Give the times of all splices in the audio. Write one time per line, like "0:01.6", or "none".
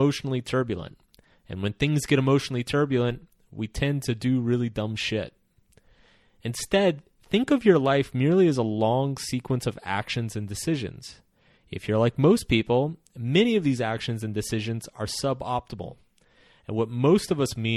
none